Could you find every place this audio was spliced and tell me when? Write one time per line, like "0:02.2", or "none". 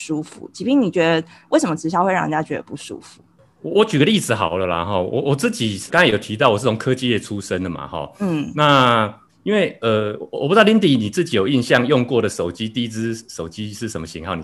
0:05.9
0:09.3